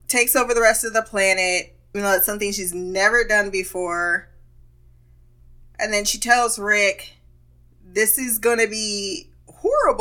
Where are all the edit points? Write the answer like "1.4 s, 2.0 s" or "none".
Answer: 1.9 s